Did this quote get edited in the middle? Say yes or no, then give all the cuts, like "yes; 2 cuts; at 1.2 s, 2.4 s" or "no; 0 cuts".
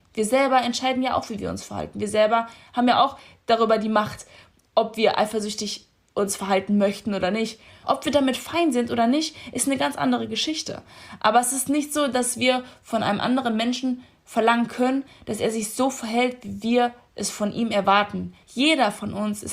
yes; 2 cuts; at 7.8 s, 18.4 s